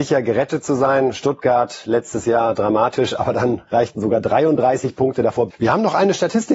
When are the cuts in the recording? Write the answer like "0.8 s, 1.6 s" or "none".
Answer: 5.5 s